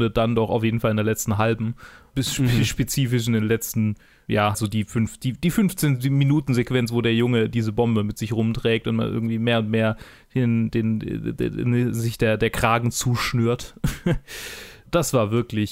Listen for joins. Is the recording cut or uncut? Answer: cut